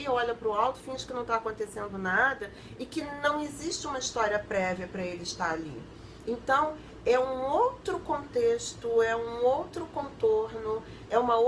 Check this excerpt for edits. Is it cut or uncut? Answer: cut